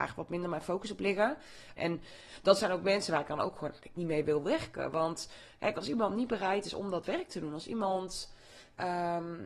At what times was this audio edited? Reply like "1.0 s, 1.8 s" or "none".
1.8 s